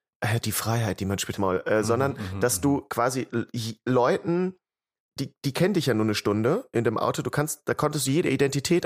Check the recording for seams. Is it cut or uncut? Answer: cut